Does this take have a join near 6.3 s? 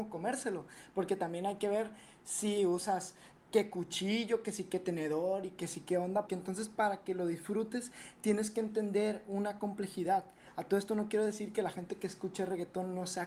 yes; 1 cut; at 6.3 s

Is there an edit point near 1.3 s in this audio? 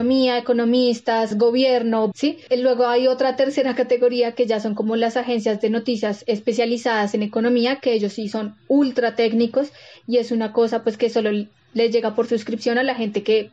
yes; 1 cut; at 1.3 s

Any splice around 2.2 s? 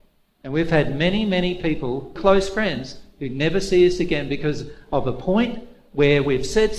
yes; 1 cut; at 2.2 s

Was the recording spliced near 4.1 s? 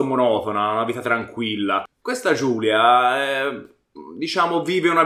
no; 1 cut; at 2.0 s

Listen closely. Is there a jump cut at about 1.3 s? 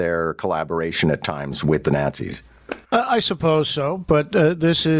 no; 1 cut; at 2.8 s

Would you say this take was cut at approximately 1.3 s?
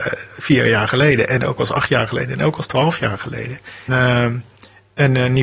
no; 1 cut; at 3.9 s

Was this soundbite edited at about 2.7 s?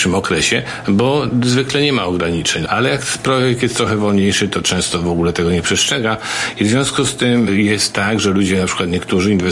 yes; 1 cut; at 2.7 s

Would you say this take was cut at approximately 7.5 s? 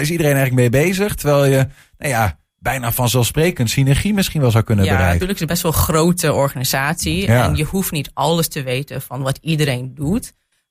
no; 1 cut; at 5.2 s

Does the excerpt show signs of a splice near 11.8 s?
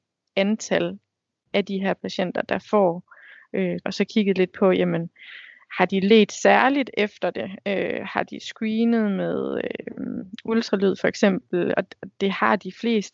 yes; 2 cuts; at 3.8 s, 11.8 s

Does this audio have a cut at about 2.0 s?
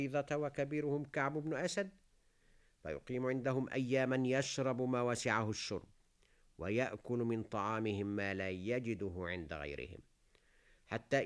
no; 0 cuts

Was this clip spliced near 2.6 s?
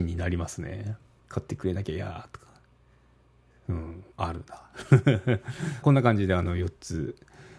no; 3 cuts; at 1.2 s, 4.1 s, 5.8 s

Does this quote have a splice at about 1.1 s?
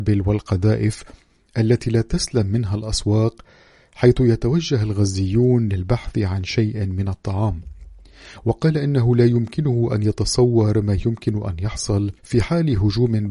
no; 1 cut; at 12.2 s

